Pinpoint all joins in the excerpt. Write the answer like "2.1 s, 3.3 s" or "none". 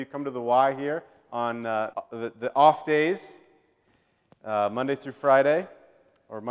1.9 s